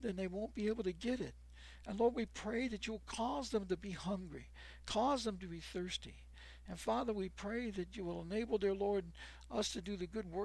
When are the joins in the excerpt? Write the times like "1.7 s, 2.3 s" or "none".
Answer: none

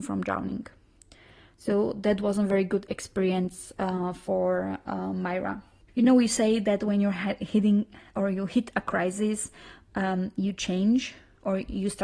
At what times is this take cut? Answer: none

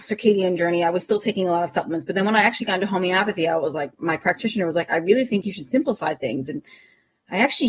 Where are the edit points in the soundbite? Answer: none

